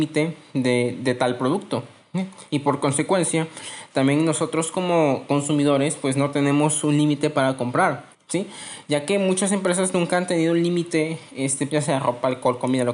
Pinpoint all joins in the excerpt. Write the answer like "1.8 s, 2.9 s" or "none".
8.1 s, 11.7 s